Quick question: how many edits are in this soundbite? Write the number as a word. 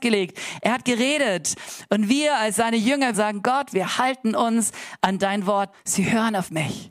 two